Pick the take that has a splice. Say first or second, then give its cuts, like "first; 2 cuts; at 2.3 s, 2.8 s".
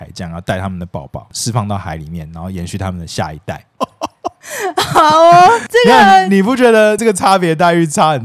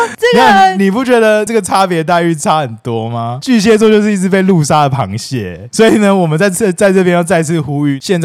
first; 1 cut; at 3.8 s